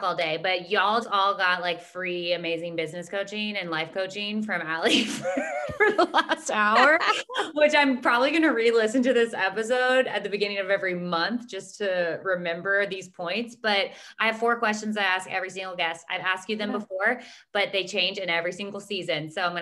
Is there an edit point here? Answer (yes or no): yes